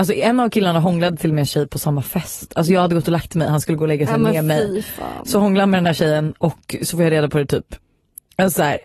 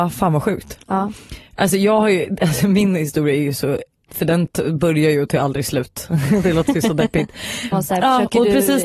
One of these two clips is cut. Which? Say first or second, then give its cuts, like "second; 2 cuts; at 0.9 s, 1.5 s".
second; 2 cuts; at 4.1 s, 7.7 s